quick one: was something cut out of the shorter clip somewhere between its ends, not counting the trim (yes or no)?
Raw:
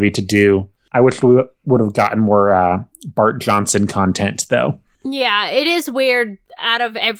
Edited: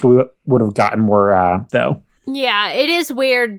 yes